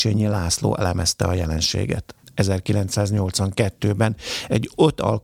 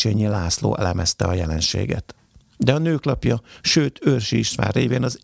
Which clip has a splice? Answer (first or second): first